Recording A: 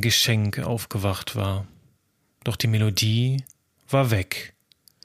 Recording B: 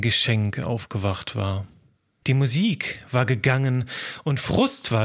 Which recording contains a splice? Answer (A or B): B